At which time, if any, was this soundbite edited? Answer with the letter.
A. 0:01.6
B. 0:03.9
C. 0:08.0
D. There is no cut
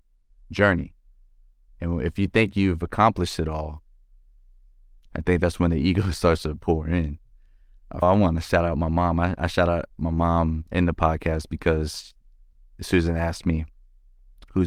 C